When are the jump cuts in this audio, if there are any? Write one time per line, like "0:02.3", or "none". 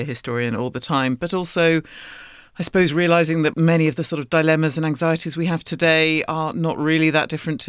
none